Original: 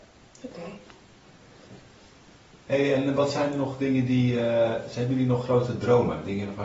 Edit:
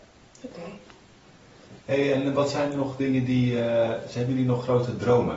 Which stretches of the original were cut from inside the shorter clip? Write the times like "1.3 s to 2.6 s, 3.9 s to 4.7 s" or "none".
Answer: 1.8 s to 2.6 s